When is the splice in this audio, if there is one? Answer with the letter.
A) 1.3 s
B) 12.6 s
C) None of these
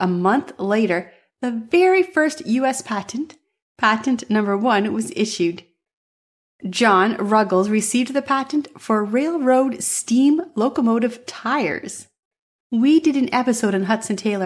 B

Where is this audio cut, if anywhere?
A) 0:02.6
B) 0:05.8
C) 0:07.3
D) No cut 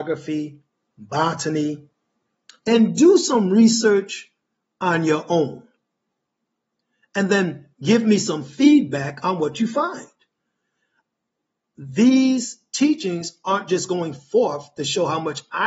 A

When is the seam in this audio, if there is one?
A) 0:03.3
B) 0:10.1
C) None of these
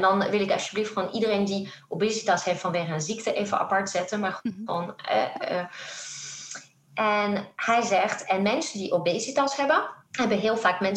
B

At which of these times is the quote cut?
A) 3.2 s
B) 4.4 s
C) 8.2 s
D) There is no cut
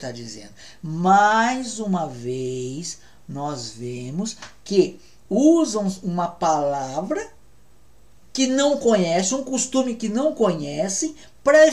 A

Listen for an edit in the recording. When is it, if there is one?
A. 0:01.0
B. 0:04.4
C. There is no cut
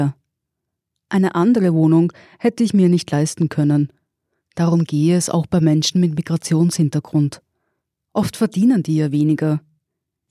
C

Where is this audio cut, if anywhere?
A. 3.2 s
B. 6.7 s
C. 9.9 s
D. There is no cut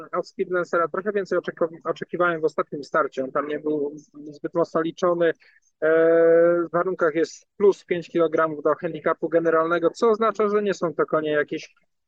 B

